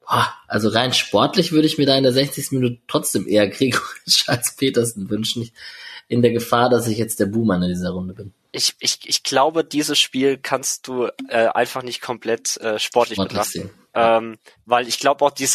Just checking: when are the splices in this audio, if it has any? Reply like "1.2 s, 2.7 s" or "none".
none